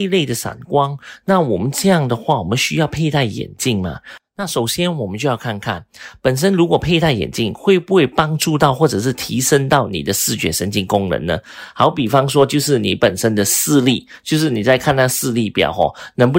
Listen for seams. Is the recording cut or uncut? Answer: uncut